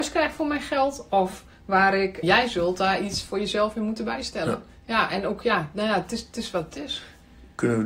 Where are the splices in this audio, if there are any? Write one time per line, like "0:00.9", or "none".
0:02.2